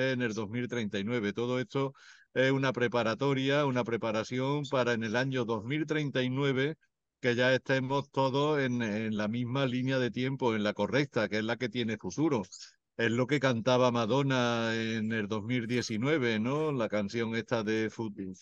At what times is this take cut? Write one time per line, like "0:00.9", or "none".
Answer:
none